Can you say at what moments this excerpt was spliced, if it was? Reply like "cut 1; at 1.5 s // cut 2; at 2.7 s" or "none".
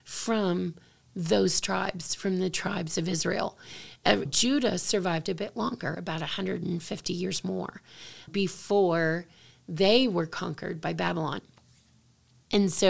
cut 1; at 4.3 s // cut 2; at 8.3 s